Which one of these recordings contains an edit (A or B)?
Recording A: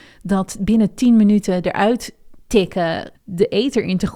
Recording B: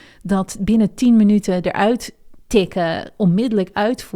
A